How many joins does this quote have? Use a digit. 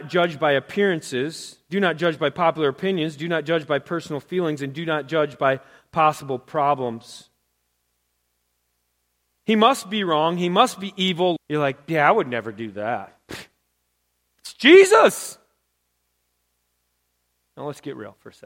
1